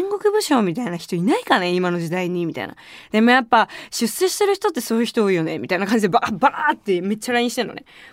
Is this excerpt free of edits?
yes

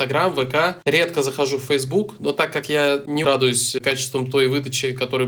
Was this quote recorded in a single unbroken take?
no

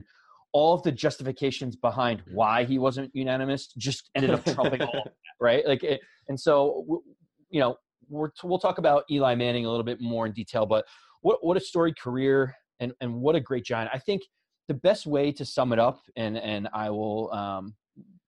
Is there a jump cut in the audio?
no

